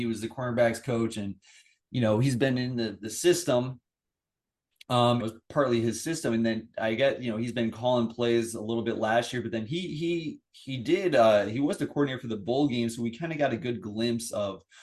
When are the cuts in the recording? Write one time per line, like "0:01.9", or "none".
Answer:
0:05.2